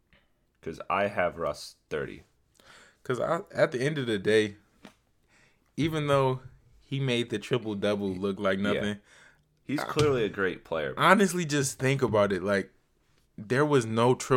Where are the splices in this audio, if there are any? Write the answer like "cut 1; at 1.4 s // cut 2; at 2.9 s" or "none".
none